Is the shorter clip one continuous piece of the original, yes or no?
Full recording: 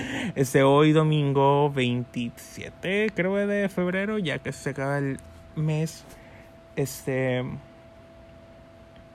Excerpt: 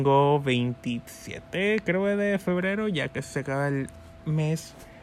yes